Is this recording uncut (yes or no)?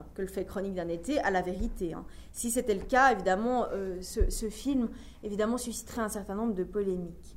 yes